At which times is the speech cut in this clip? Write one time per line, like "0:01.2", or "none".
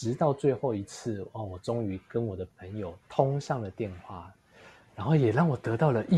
0:03.0